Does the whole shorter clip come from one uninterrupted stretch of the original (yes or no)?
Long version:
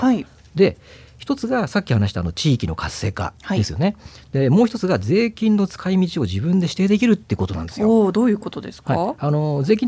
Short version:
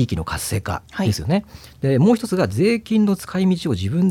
yes